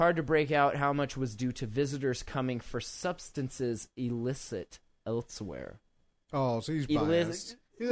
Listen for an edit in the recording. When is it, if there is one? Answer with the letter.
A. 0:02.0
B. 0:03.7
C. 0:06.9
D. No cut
C